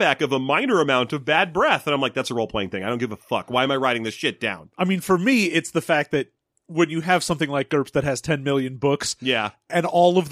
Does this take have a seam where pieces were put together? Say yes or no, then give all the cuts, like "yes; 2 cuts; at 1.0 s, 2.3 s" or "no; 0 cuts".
no; 0 cuts